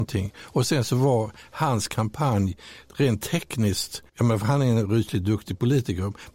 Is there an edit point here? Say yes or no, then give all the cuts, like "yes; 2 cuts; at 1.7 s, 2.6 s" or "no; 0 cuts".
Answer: yes; 1 cut; at 4.1 s